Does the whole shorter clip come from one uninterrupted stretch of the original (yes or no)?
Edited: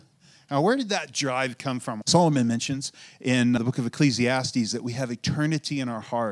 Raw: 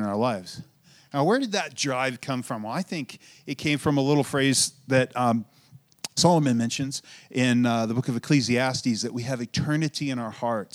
no